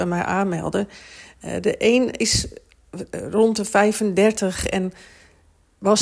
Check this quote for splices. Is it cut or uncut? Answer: uncut